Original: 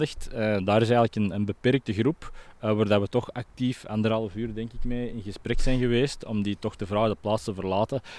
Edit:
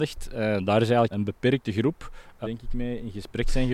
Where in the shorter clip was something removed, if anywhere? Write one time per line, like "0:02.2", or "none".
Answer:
0:01.1
0:02.4